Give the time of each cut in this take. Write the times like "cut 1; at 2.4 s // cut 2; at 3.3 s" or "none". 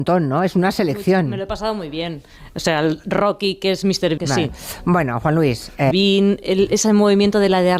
cut 1; at 4.2 s // cut 2; at 5.9 s